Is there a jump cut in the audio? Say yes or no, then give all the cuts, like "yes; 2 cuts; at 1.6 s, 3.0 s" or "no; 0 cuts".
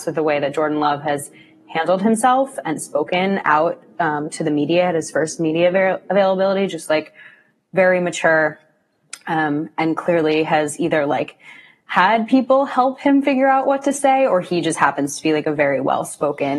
no; 0 cuts